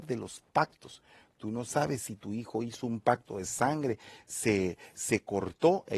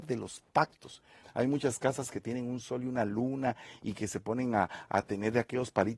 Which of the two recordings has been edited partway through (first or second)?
second